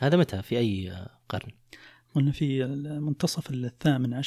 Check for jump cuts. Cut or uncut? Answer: uncut